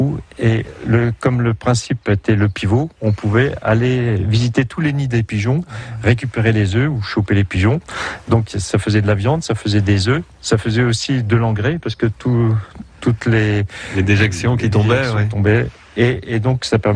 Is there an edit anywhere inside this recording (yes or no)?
no